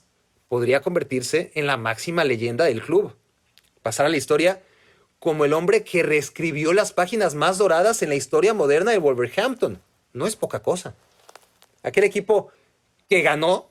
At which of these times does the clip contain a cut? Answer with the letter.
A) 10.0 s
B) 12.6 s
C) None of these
C